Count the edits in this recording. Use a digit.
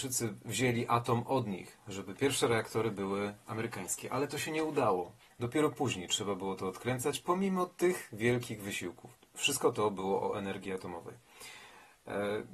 2